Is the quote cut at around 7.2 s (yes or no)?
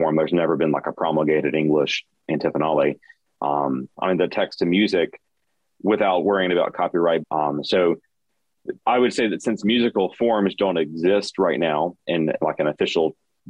yes